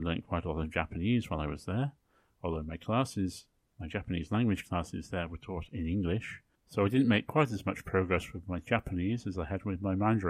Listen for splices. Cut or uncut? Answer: uncut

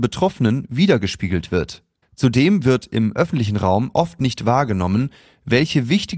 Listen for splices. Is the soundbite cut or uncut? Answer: cut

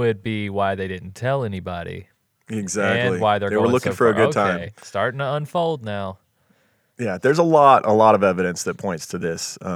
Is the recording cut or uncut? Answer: uncut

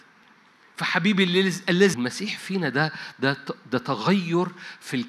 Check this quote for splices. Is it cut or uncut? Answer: cut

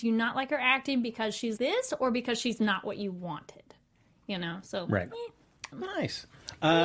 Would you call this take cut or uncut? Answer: cut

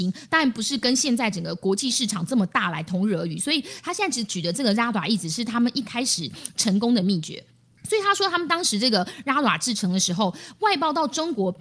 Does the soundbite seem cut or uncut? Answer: uncut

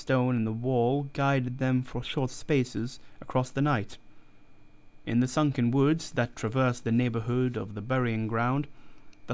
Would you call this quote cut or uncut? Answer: cut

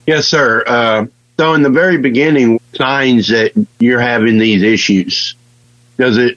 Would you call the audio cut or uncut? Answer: cut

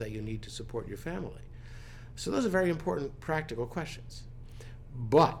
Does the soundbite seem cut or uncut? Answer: uncut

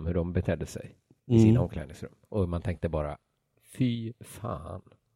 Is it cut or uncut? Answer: uncut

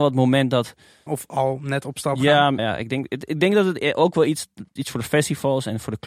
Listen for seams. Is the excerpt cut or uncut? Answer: cut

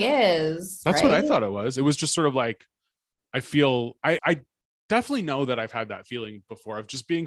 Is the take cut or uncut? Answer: cut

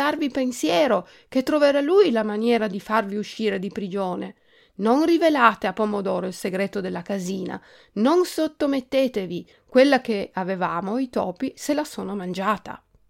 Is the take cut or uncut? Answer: cut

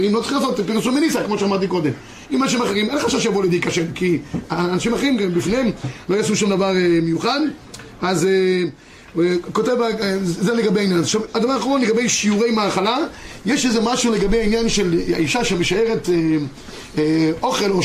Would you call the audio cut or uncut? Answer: uncut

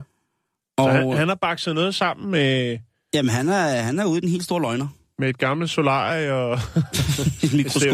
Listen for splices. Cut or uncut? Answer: uncut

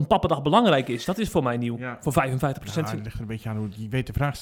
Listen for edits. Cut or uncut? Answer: uncut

